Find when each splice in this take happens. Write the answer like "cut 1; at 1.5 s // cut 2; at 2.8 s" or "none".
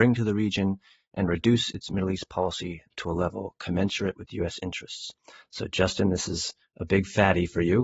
none